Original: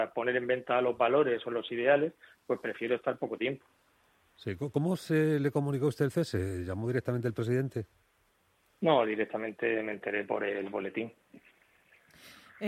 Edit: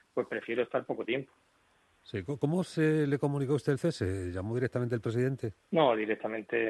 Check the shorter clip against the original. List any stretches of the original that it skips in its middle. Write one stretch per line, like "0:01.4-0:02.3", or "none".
0:07.9-0:08.7